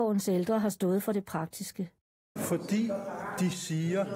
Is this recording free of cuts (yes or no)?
no